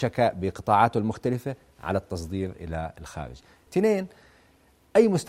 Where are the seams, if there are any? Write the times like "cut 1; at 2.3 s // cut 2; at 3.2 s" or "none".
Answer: cut 1; at 3.7 s